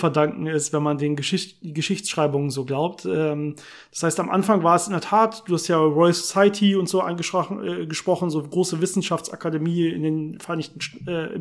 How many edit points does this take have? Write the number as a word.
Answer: zero